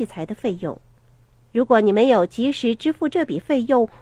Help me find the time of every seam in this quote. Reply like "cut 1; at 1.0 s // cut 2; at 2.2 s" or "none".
none